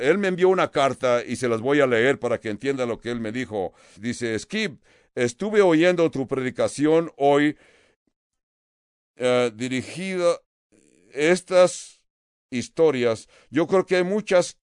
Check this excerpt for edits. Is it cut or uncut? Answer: cut